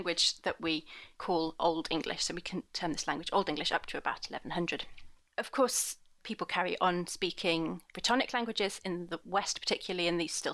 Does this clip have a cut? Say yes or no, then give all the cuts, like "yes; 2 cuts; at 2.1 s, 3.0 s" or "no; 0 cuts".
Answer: no; 0 cuts